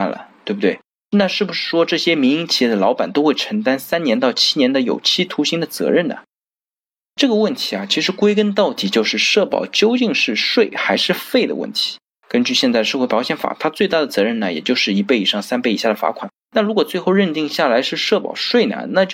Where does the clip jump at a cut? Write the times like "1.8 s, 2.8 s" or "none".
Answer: 12.2 s, 16.4 s